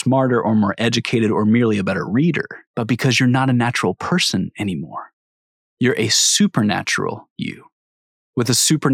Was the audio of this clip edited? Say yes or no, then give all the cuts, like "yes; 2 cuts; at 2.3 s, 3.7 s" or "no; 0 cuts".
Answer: yes; 1 cut; at 2.6 s